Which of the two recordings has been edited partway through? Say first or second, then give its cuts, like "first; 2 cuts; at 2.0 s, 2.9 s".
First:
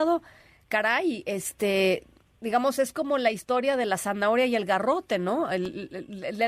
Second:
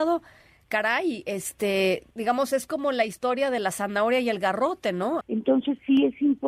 second; 2 cuts; at 2.1 s, 5.2 s